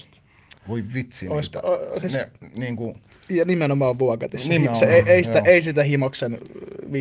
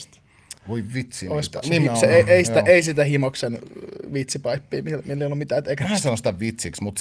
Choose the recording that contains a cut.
second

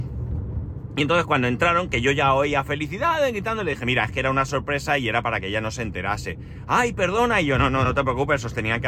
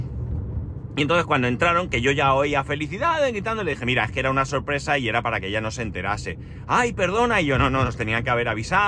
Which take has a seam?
second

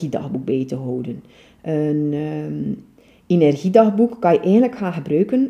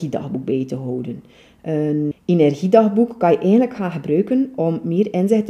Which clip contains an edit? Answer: second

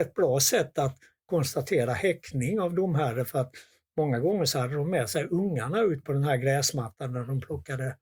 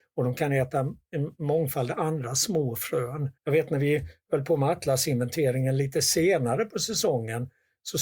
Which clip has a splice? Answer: second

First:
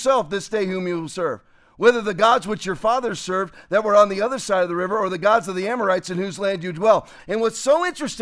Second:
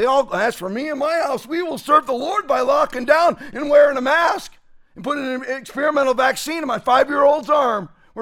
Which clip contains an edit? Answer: first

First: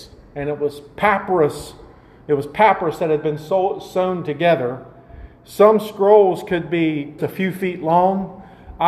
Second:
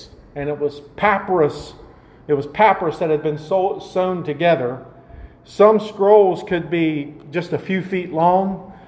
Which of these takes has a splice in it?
first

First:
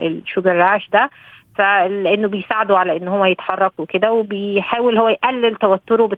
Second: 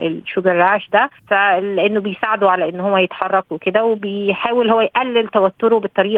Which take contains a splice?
second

